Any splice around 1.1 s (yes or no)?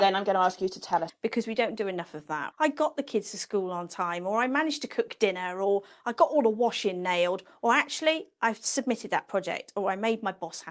yes